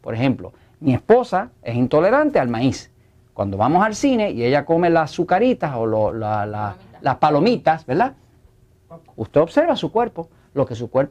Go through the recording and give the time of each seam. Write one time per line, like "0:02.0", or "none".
0:09.1